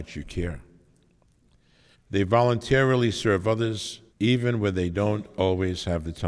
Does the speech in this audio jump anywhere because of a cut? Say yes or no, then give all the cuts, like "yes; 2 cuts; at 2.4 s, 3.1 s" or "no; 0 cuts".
yes; 2 cuts; at 1.9 s, 4.1 s